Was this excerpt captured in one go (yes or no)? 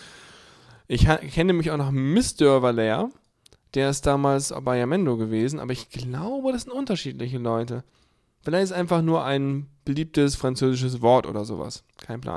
yes